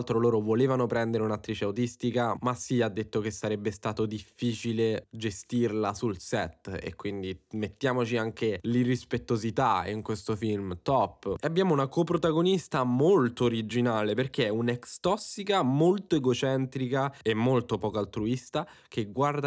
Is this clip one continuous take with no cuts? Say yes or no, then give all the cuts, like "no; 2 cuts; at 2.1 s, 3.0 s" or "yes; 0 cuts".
yes; 0 cuts